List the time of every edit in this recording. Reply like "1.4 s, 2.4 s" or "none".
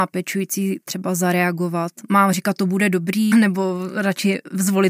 3.3 s